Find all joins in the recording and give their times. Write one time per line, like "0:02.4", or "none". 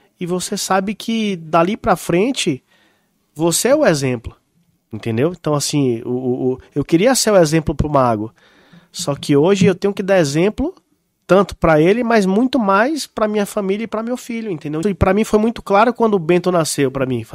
0:14.8